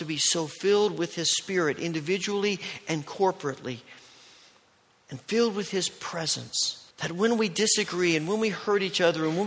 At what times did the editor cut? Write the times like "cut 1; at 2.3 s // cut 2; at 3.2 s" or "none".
cut 1; at 6.9 s